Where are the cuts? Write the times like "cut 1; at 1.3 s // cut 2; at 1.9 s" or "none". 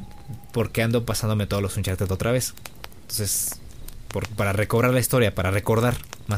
none